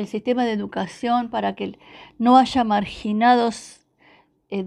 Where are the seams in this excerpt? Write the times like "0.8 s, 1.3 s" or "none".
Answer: none

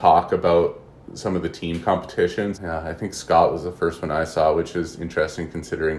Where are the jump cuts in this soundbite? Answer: 2.5 s

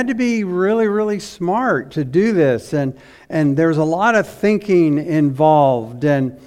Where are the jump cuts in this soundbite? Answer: none

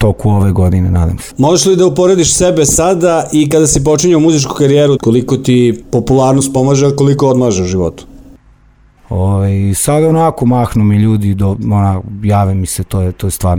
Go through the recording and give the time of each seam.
5.0 s, 9.0 s

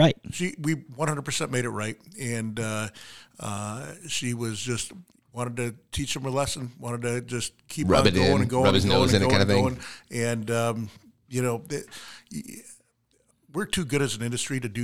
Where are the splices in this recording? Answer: none

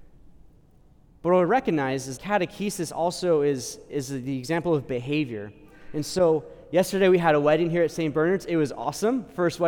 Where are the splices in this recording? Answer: 2.2 s

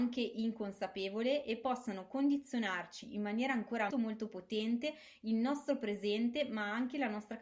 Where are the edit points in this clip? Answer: 3.9 s

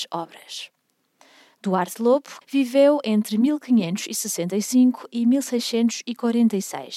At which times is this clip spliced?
2.4 s

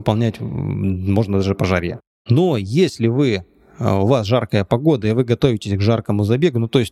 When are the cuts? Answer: none

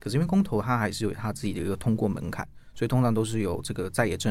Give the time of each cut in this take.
none

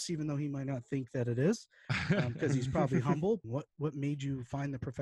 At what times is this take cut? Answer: 3.4 s

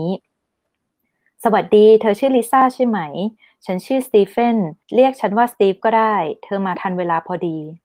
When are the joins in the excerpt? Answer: 4.8 s

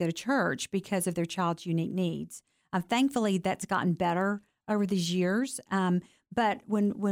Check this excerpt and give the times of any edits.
none

